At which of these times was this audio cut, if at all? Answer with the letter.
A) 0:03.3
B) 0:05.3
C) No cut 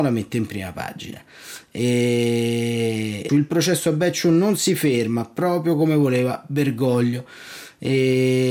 A